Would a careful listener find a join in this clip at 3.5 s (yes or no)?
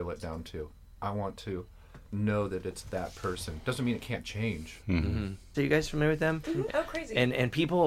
no